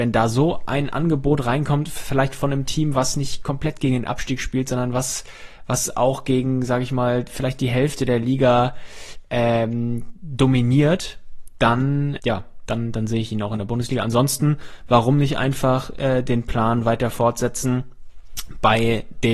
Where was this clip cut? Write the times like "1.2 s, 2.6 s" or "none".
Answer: 12.2 s